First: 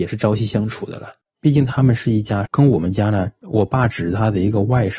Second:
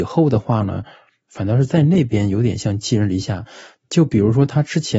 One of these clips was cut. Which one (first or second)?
first